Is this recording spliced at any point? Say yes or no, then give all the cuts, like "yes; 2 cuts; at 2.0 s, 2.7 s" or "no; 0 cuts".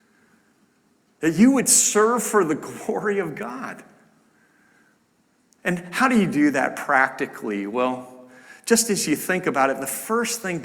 no; 0 cuts